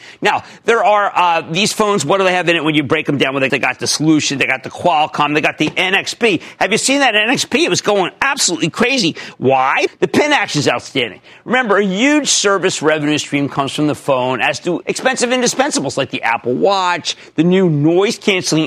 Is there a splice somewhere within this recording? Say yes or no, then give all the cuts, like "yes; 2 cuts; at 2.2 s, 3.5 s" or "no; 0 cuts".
yes; 3 cuts; at 3.5 s, 9.9 s, 14.8 s